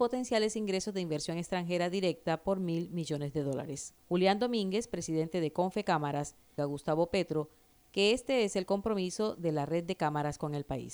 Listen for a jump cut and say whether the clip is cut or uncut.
cut